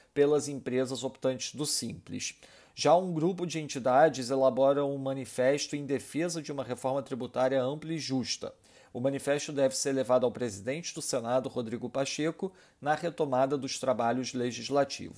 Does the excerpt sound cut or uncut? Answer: uncut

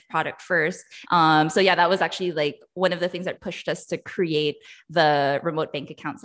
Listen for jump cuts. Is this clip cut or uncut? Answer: cut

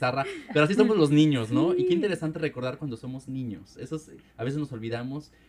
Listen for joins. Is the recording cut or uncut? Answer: uncut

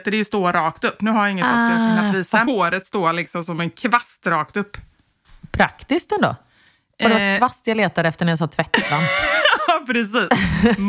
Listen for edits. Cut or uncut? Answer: cut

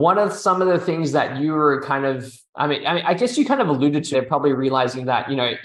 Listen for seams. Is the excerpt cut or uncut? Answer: cut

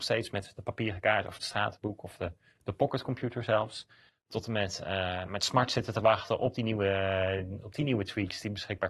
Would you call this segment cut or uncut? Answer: cut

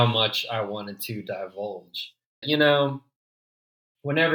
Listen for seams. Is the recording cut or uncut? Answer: cut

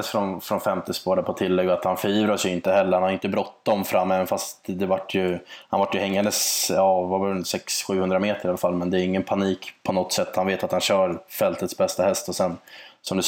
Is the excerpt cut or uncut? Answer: uncut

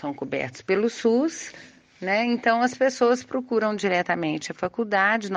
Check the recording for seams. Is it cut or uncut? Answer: uncut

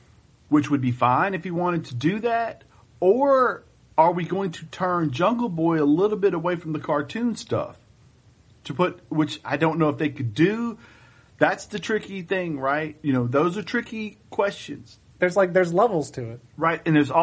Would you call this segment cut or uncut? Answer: cut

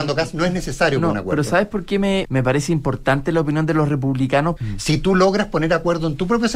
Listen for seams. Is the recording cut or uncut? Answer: cut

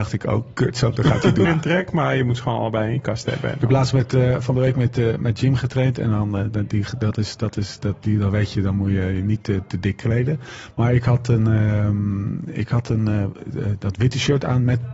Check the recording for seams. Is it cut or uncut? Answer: cut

